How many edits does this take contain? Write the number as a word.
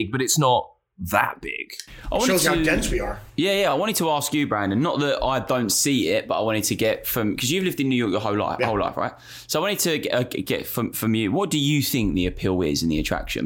zero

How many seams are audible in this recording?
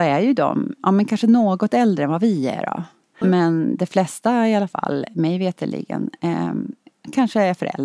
one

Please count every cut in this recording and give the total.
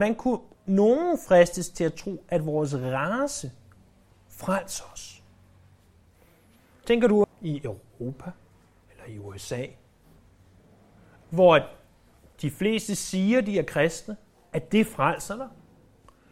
one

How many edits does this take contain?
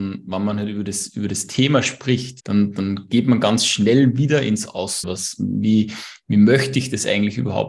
two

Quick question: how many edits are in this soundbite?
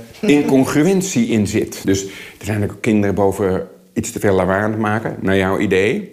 one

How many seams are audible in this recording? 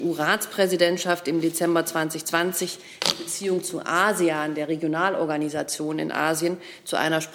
zero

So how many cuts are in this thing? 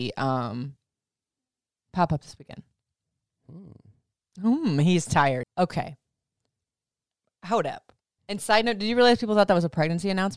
two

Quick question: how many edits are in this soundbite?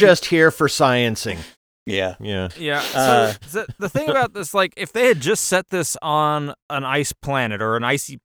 one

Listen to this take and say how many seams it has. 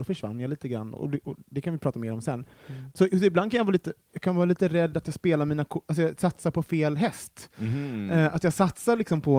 one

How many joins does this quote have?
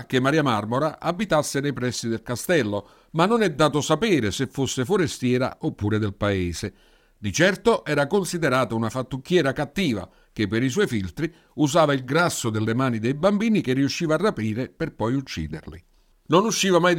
zero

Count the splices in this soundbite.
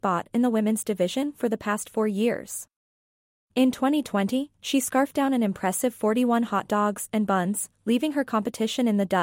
zero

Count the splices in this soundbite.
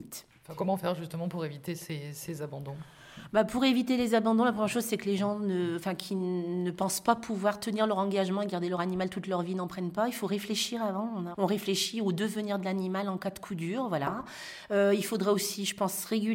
one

